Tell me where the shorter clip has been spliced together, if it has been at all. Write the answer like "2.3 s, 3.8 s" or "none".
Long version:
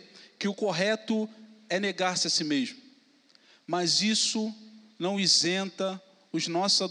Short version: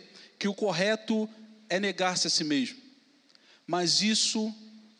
none